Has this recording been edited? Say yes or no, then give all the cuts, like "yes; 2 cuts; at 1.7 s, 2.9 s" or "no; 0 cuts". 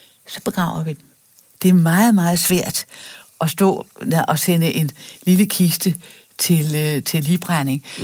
no; 0 cuts